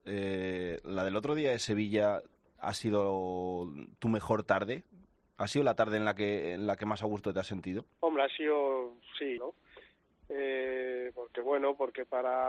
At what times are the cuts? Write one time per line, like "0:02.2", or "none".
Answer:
0:07.9
0:09.4